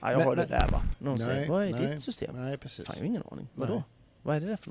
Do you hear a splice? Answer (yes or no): yes